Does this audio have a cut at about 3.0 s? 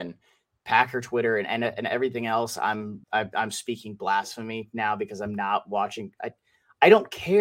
yes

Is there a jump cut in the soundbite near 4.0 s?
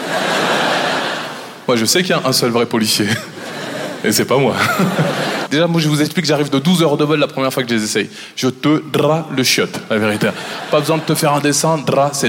no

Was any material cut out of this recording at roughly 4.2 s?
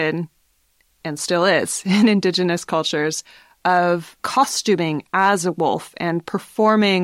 yes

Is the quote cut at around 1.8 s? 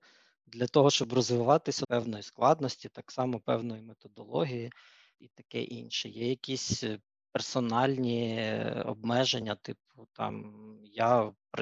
yes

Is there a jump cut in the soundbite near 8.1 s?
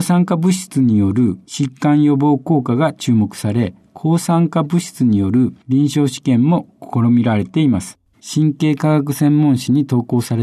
yes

